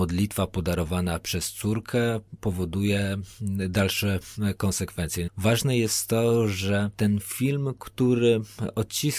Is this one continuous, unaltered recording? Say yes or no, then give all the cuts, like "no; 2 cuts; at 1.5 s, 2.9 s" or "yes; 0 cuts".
no; 1 cut; at 5.3 s